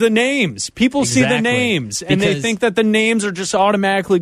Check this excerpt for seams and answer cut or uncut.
uncut